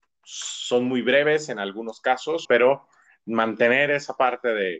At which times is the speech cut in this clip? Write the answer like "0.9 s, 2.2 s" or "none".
2.4 s